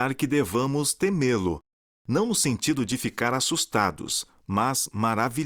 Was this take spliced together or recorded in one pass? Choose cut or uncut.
uncut